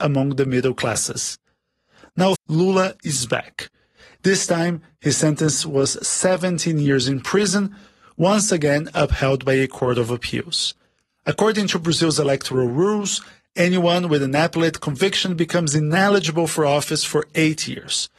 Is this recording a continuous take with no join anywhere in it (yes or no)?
no